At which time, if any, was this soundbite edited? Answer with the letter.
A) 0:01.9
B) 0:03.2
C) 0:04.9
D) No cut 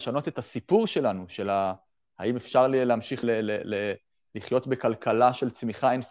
B